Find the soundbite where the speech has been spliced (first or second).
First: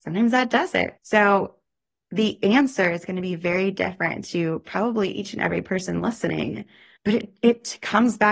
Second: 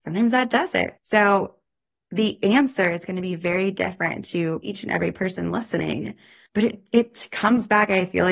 second